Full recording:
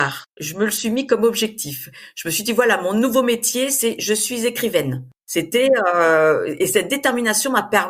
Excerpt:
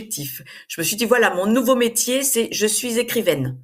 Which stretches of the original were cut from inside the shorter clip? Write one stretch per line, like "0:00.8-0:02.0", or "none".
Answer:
none